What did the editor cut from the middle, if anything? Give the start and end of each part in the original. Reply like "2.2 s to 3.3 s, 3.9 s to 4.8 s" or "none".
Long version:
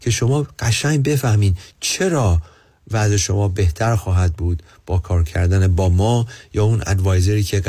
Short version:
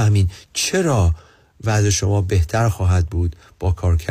none